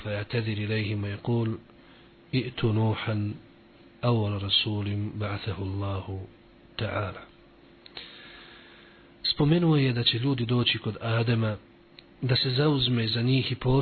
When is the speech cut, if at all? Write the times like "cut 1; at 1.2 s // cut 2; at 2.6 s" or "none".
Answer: none